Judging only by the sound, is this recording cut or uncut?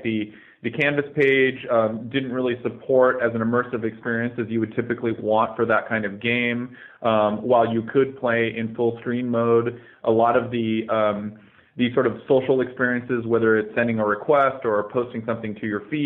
uncut